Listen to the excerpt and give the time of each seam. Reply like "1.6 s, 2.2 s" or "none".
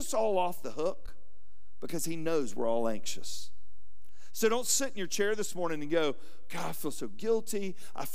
none

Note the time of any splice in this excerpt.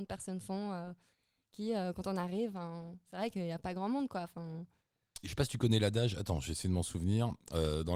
5.2 s

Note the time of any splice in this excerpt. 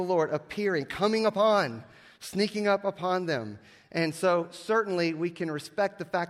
none

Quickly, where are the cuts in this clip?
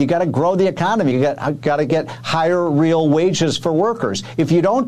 1.1 s

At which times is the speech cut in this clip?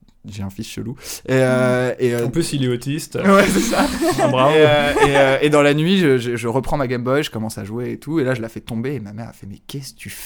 none

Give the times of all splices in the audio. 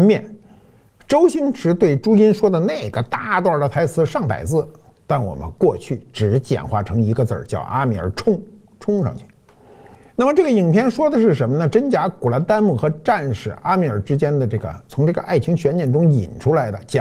8.7 s

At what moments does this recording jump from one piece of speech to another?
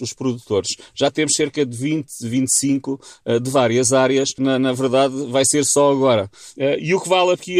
4.4 s

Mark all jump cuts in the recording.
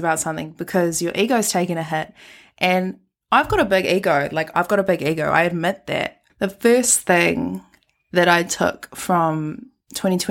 4.5 s, 6.3 s

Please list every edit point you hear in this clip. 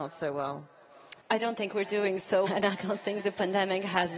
1.2 s, 2.5 s

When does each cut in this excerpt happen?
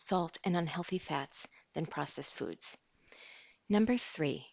3.5 s

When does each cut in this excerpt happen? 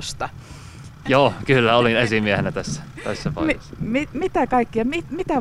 1.0 s

